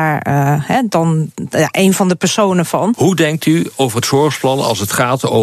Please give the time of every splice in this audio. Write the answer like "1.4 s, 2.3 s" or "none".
2.9 s

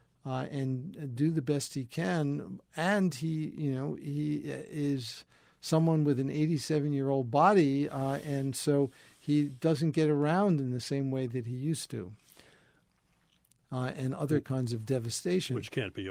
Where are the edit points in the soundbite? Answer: 13.6 s

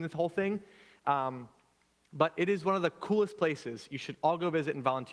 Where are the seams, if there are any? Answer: none

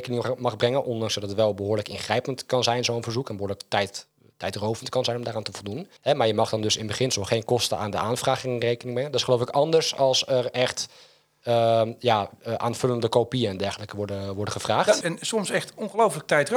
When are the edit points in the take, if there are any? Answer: 6.0 s, 15.0 s

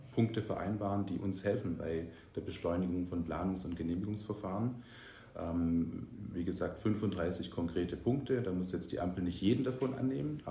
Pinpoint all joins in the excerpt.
6.3 s

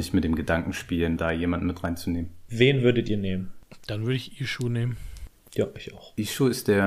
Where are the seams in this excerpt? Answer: 1.2 s, 2.5 s

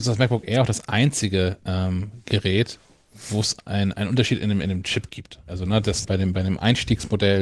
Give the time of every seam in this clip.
6.0 s

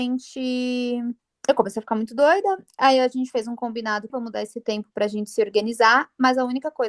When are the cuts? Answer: 4.1 s

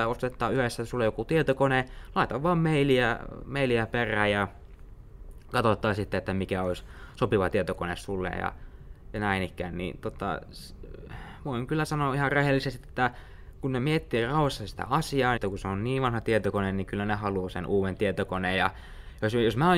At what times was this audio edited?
15.4 s

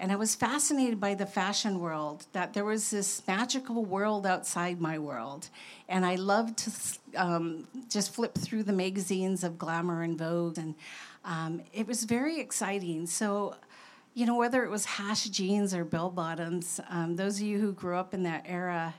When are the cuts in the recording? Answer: 10.6 s

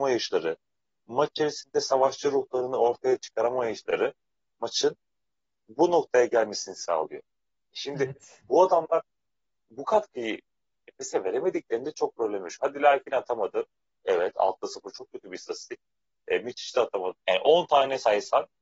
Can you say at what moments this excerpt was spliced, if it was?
7.6 s, 17.1 s

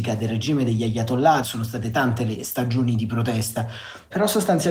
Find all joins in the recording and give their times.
1.4 s

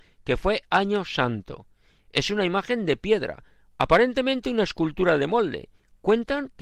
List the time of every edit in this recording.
none

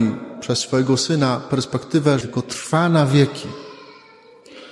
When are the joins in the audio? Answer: 2.2 s

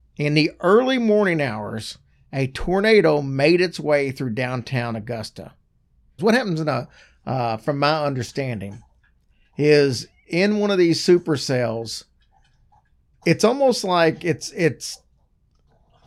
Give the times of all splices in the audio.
6.2 s

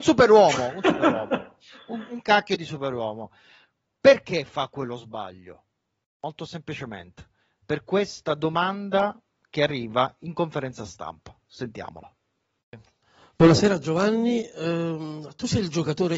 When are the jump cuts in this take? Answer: none

